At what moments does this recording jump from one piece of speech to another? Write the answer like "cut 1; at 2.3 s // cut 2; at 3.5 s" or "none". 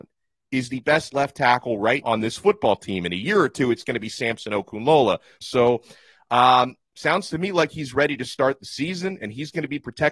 cut 1; at 2.0 s // cut 2; at 5.4 s